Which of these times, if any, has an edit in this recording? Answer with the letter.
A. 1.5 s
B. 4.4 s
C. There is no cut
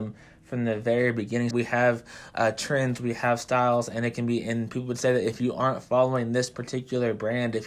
A